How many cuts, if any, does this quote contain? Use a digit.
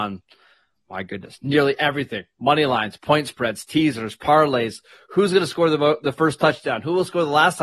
0